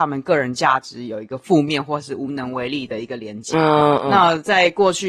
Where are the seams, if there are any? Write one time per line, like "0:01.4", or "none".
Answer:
none